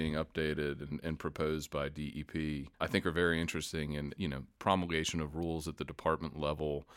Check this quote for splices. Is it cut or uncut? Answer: cut